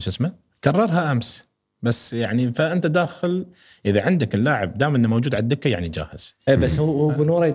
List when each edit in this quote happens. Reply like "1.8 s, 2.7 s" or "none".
6.4 s